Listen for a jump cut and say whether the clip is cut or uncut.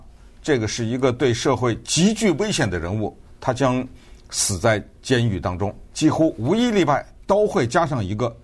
cut